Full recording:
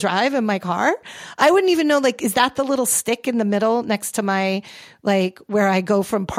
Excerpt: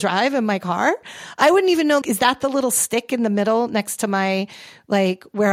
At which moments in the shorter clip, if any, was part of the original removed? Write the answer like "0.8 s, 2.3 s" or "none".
2.0 s

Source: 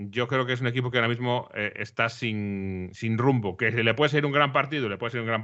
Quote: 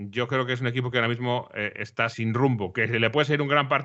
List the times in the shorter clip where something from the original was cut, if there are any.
2.1 s

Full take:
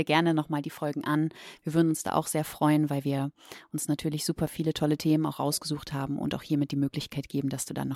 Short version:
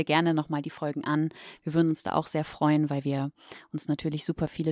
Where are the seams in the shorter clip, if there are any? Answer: none

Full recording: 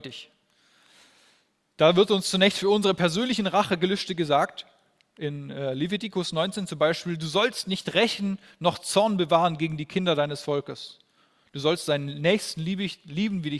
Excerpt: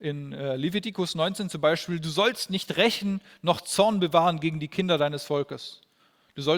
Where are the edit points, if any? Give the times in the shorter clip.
none

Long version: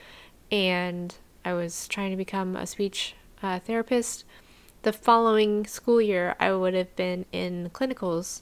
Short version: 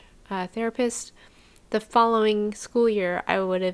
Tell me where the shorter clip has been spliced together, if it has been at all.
none

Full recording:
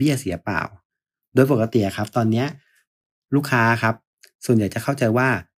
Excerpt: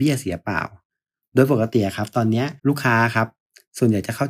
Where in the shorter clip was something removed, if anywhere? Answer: 2.6 s

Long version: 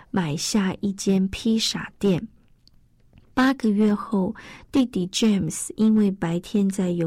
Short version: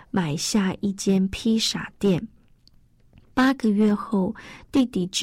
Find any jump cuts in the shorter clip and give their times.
none

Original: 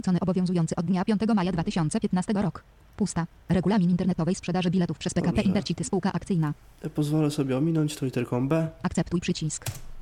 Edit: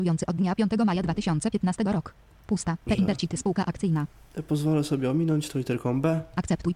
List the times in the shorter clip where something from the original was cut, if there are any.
2.9 s

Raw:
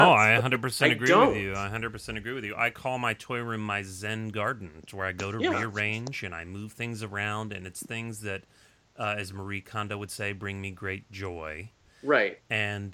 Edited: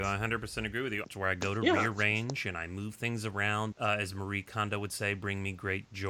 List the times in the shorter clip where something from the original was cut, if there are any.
1.0 s, 3.7 s

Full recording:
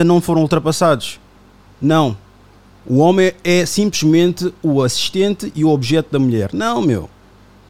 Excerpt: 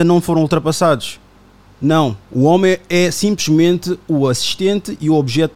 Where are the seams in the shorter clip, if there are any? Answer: 2.2 s

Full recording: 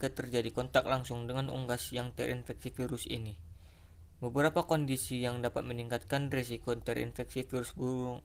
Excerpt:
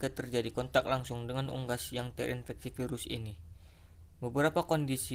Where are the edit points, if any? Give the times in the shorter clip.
none

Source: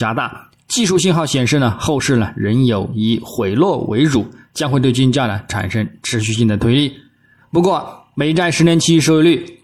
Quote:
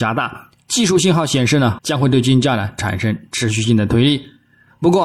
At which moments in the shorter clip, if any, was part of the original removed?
1.8 s

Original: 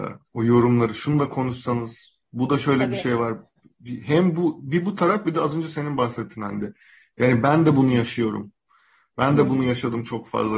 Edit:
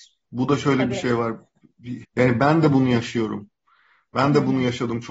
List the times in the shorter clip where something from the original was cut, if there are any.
2.0 s

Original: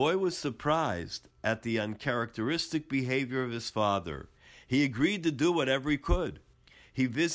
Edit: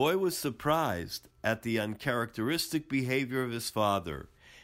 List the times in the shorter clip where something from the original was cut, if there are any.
none

